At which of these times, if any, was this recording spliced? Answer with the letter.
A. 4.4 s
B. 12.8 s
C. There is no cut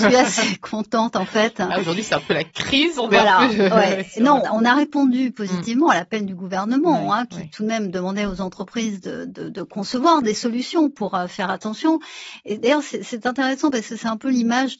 A